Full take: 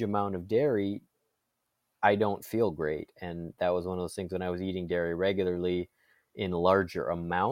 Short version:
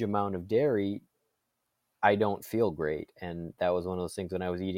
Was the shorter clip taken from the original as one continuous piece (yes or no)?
yes